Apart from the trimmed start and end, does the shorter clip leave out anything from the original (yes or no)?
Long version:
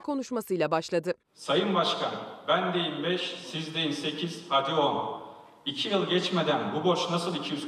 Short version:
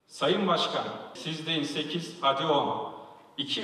yes